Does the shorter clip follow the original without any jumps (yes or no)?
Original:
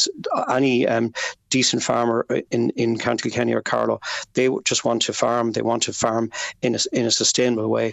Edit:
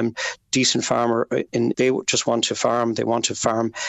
no